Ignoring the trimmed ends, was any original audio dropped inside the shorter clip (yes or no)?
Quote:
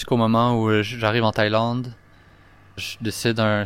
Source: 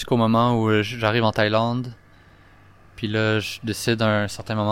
yes